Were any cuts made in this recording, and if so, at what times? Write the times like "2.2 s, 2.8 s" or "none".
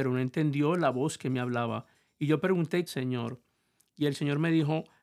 2.9 s